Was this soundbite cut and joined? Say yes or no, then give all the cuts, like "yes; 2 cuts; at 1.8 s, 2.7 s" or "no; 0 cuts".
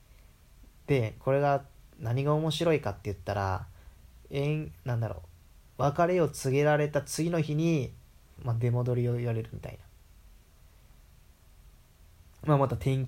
yes; 1 cut; at 8.4 s